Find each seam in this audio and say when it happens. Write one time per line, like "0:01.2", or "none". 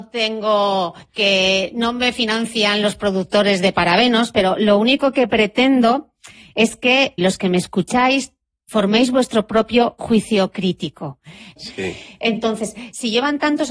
0:07.2
0:11.6